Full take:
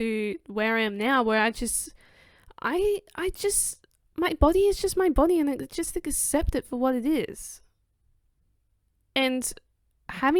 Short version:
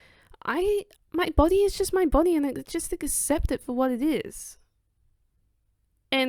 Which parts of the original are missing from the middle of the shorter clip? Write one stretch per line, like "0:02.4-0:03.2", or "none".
0:03.1-0:04.0